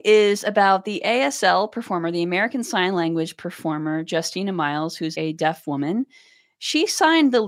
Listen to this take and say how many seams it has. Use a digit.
0